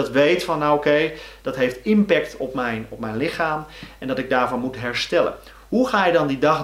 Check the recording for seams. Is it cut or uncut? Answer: uncut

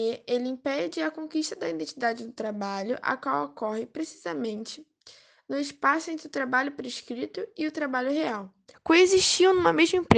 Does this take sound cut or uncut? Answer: cut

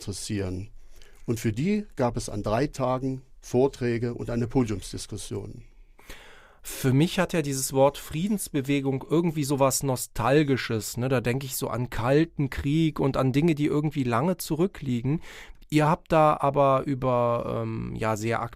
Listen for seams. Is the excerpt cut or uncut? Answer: uncut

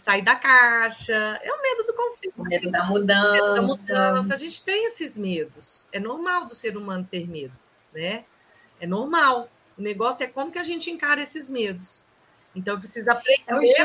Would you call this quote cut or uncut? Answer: uncut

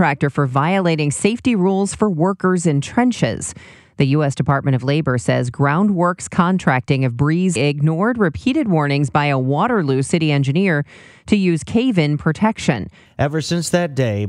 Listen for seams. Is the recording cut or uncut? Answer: cut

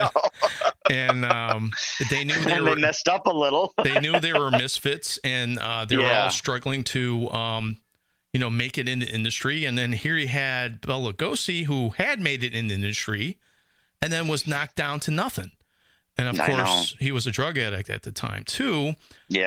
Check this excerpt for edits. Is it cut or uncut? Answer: uncut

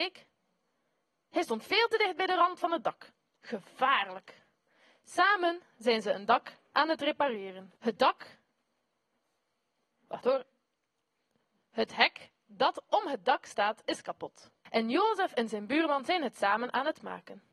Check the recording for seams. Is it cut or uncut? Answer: cut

